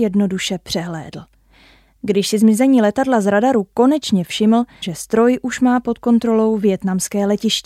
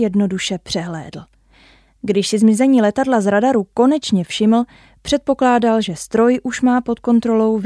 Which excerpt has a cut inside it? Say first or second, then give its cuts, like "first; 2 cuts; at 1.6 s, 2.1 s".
first; 1 cut; at 4.8 s